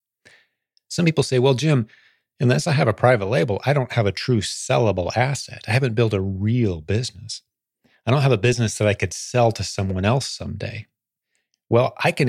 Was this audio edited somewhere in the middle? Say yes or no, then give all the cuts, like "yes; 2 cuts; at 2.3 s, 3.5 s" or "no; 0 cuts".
no; 0 cuts